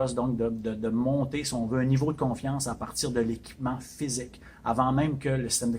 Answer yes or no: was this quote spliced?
no